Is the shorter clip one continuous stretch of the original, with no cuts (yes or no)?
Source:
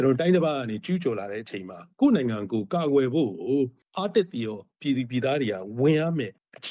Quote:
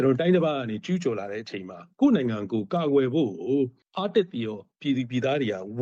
yes